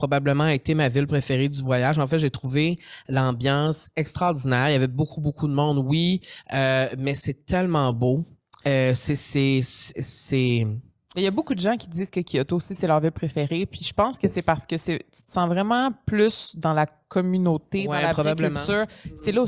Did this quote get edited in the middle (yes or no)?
no